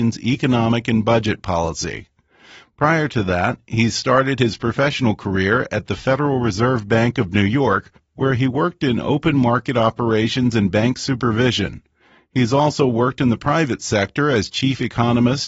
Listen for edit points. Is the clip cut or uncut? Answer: uncut